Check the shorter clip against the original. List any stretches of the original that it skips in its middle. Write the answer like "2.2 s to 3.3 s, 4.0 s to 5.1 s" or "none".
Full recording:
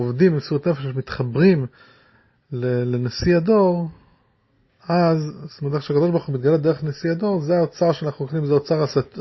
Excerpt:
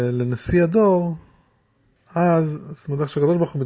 none